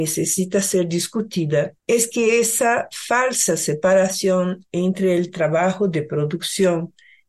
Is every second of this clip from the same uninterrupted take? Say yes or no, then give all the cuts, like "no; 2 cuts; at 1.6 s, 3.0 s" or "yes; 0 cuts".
no; 1 cut; at 1.8 s